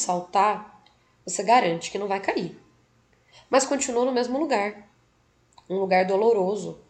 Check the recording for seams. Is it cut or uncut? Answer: uncut